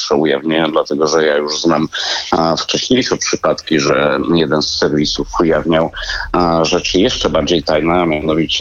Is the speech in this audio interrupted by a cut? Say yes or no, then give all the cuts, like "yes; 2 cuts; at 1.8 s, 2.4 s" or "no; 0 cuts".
no; 0 cuts